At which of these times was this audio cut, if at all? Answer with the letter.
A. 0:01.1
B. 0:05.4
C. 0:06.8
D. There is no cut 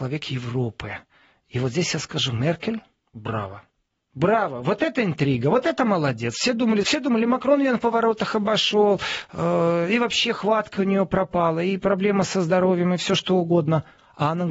C